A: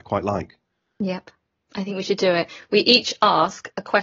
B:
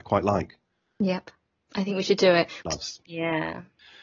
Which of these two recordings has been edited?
B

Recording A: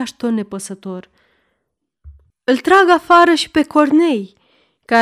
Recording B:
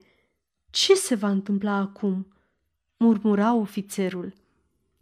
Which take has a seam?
A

